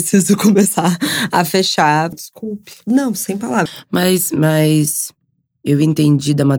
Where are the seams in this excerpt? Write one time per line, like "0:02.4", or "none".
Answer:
0:02.1
0:03.7